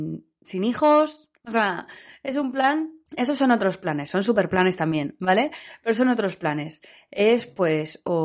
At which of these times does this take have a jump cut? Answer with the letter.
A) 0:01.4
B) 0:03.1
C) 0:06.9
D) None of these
B